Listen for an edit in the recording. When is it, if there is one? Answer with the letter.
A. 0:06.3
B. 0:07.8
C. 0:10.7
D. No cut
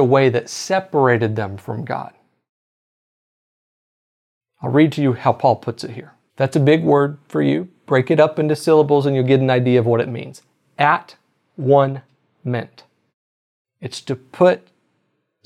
A